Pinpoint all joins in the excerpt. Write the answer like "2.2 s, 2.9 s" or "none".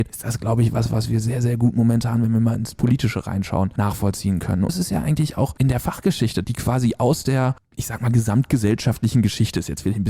4.7 s, 6.4 s